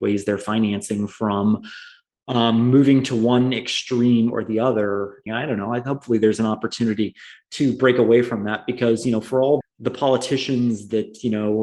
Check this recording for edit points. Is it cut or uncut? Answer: cut